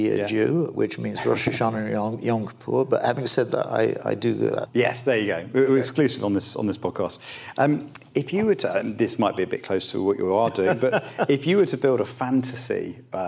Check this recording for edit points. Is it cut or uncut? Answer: cut